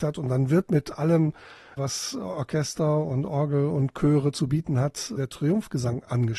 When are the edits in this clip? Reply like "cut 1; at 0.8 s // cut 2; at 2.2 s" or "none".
none